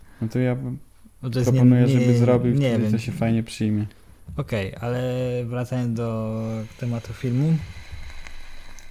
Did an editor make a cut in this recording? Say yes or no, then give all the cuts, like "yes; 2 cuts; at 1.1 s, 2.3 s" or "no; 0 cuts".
no; 0 cuts